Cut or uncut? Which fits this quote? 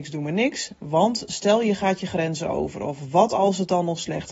uncut